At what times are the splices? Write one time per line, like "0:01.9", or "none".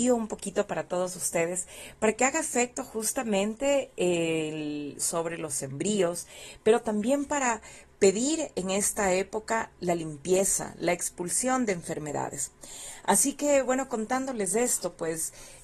0:05.0